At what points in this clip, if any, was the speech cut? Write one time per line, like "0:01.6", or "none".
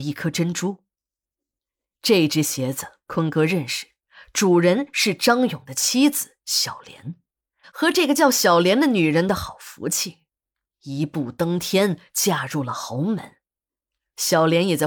0:07.6